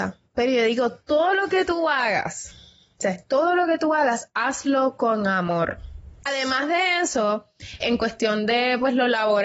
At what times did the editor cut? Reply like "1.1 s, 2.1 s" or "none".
6.3 s, 7.8 s

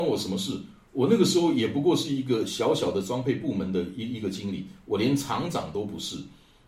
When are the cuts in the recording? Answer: none

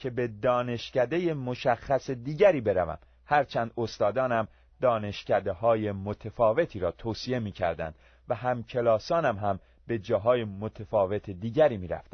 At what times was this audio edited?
none

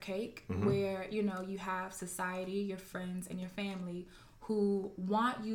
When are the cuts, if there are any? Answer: none

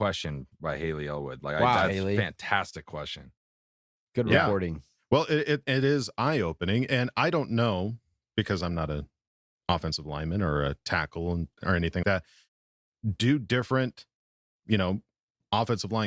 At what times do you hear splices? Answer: 12.0 s

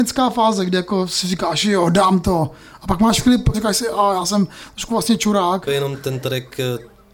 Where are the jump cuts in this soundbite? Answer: 3.5 s, 5.7 s

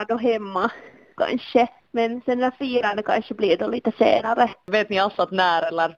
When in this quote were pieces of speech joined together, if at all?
none

